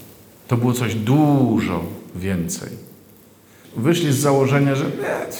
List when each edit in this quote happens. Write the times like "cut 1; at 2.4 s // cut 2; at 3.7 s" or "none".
cut 1; at 3.6 s